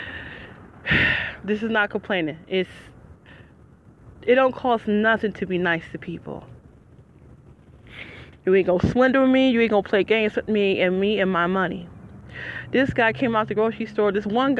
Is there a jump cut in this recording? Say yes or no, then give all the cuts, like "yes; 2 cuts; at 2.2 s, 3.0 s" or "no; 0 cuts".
no; 0 cuts